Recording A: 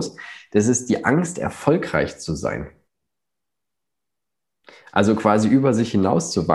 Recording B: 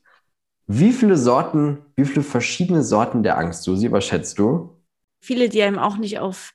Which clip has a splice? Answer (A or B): B